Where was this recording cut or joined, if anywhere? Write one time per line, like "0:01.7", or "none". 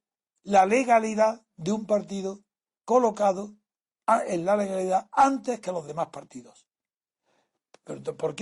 none